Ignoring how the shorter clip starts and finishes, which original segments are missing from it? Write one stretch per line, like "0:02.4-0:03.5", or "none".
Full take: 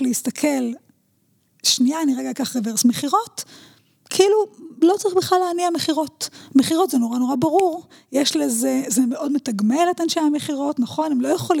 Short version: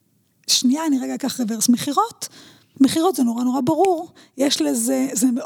0:03.9-0:06.5